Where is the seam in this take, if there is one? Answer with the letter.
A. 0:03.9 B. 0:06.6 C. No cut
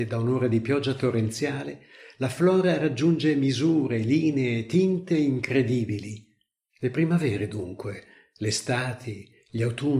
B